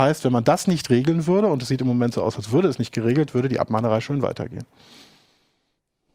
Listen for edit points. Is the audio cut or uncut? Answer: uncut